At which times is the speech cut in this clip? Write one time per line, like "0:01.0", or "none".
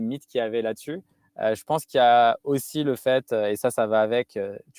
none